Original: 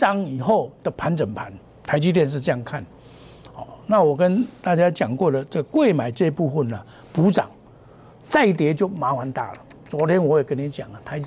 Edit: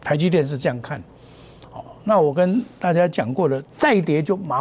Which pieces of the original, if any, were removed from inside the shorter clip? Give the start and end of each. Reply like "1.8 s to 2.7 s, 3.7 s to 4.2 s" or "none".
5.5 s to 8.2 s